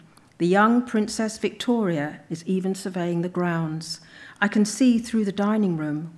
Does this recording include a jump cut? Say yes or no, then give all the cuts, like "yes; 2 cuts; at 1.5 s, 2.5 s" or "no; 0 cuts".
no; 0 cuts